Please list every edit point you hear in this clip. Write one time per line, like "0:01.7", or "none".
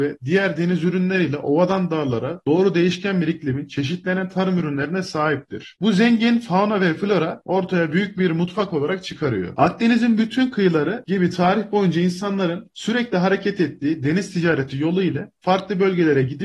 none